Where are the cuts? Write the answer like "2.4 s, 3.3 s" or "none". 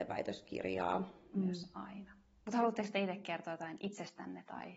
1.3 s